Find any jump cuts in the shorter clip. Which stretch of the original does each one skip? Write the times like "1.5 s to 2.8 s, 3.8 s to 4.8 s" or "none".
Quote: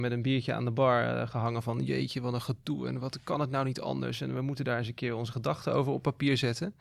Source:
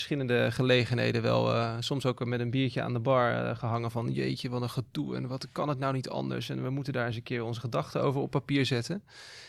none